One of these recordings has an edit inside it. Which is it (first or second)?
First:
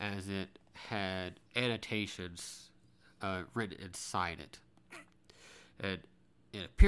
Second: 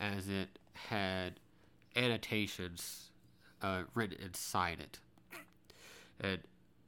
first